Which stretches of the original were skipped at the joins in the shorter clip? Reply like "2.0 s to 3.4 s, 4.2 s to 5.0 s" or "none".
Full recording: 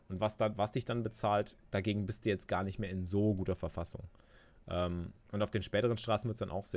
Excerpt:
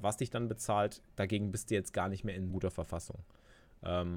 3.1 s to 3.4 s